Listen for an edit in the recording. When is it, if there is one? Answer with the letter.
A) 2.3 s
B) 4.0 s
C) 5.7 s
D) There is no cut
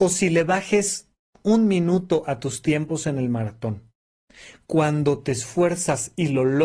D